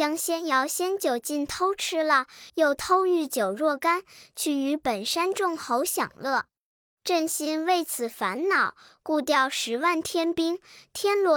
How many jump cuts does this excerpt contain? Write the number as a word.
one